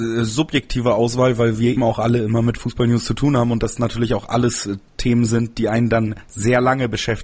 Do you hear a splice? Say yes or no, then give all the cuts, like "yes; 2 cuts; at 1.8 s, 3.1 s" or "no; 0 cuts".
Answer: yes; 1 cut; at 1.8 s